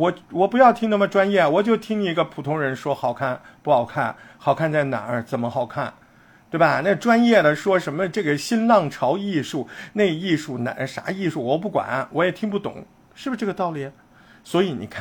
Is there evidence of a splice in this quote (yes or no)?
no